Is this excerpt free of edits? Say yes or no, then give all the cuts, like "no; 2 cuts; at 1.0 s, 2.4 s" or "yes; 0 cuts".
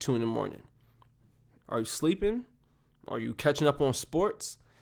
no; 1 cut; at 1.6 s